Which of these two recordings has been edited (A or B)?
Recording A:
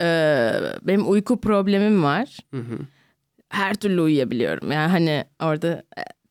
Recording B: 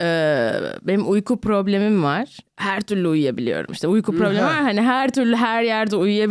B